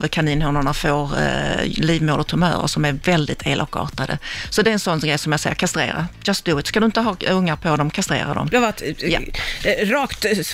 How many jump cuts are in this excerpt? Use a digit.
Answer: 1